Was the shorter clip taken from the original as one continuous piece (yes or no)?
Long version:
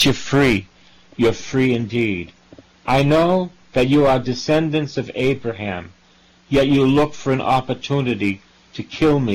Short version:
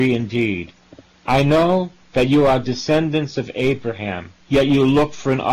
no